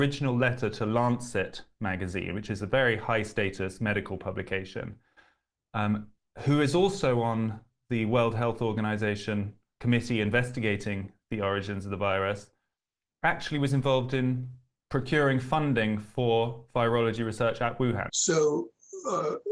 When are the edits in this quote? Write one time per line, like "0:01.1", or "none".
0:18.1